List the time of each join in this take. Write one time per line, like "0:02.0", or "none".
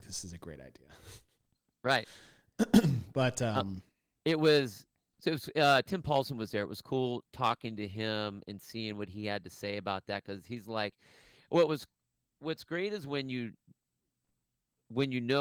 none